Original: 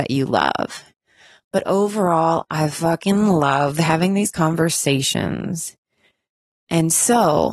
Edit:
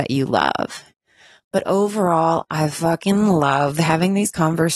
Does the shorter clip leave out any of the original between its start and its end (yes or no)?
no